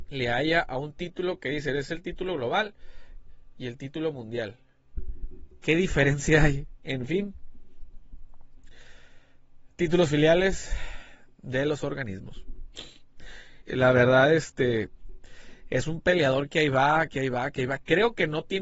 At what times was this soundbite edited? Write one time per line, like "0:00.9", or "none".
0:06.8
0:13.6